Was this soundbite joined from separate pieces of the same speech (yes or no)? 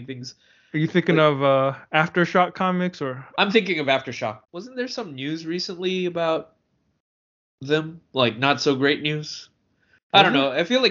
yes